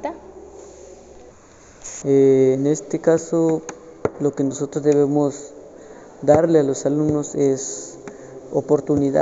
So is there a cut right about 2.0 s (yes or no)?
yes